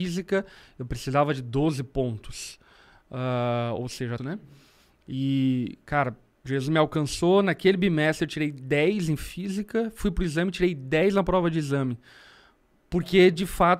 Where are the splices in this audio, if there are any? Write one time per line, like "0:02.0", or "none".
0:04.2